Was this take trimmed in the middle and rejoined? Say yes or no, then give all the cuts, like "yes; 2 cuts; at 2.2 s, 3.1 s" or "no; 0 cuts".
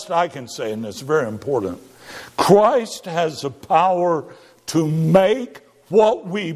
no; 0 cuts